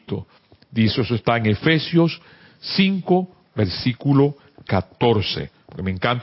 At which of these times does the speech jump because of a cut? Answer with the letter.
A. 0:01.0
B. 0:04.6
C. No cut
C